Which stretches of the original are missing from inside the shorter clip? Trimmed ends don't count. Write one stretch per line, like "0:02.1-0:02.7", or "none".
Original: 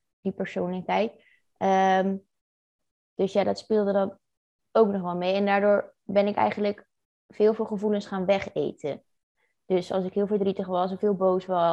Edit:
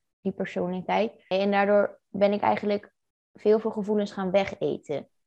0:01.3-0:05.3

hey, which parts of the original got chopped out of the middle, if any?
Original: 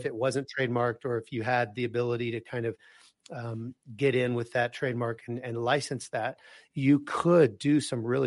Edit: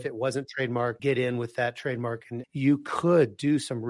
0:01.0-0:04.0
0:05.4-0:06.7

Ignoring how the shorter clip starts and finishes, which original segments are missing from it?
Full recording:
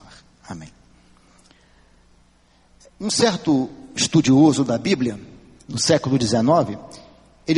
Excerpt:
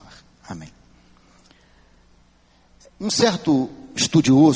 none

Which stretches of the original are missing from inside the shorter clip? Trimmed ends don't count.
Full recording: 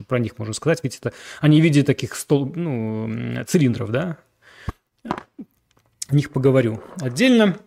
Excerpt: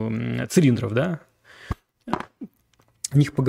none

